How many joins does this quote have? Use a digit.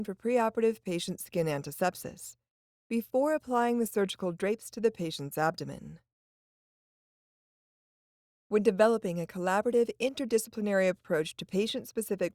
0